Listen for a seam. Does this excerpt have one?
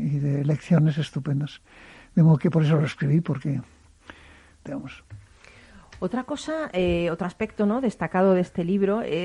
yes; 1 cut; at 4.7 s

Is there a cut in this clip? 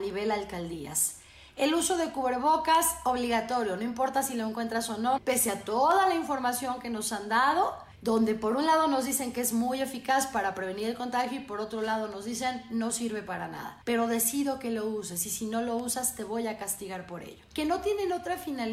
yes; 1 cut; at 5.2 s

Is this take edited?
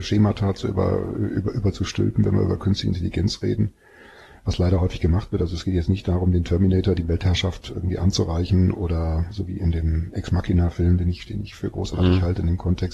no; 0 cuts

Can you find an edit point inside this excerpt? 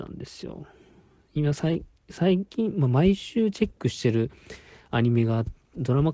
no; 0 cuts

